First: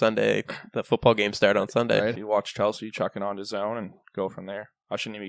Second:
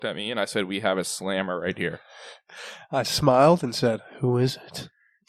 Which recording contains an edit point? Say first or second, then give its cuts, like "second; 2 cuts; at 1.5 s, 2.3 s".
first; 1 cut; at 2.1 s